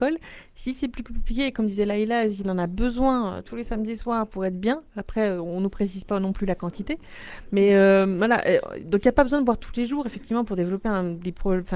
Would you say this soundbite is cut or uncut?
uncut